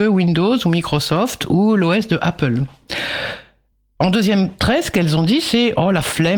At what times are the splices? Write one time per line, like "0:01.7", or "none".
none